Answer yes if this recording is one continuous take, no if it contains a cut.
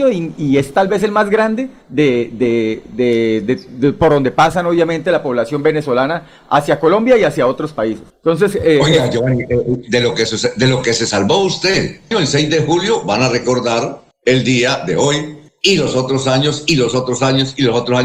no